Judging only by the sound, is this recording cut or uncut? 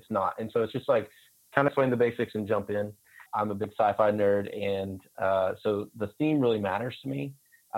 cut